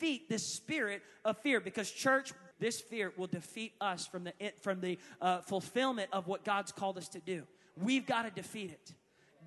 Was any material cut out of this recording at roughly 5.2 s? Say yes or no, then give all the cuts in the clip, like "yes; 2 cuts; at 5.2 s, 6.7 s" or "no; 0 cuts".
no; 1 cut; at 2.5 s